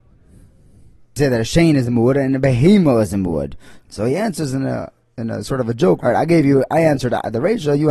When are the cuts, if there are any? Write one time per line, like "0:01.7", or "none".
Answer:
0:03.8
0:06.0